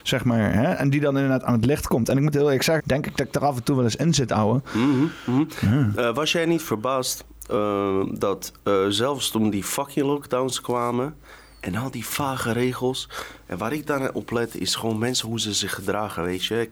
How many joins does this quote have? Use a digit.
1